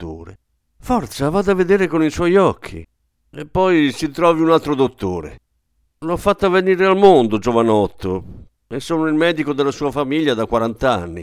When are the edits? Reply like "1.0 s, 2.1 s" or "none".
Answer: none